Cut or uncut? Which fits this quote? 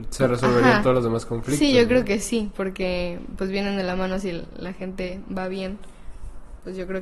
uncut